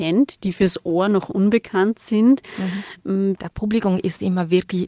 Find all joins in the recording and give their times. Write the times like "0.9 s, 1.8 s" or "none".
3.4 s